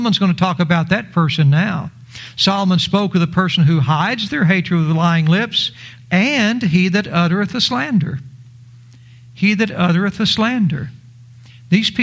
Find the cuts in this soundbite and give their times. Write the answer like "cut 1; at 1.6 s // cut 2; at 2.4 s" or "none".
cut 1; at 6.0 s